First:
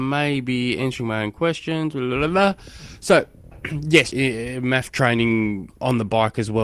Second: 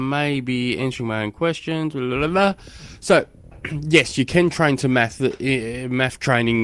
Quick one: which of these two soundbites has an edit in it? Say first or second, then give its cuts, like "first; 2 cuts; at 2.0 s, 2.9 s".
first; 1 cut; at 4.1 s